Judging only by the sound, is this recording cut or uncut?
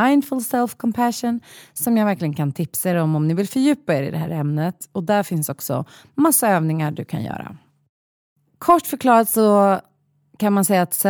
uncut